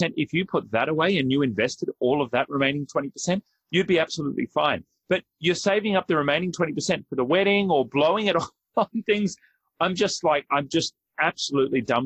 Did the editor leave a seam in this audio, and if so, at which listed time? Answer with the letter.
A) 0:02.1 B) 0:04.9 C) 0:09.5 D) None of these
D